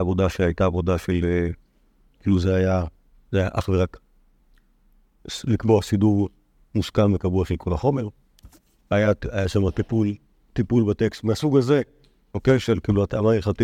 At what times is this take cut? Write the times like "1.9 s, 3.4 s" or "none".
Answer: none